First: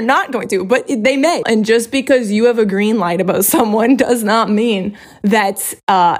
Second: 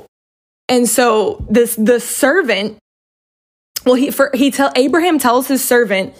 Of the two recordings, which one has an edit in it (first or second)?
first